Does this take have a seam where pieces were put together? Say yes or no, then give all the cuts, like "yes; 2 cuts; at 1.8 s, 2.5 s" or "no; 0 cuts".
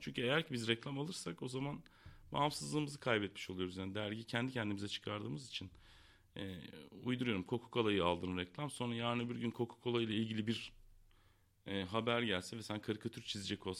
no; 0 cuts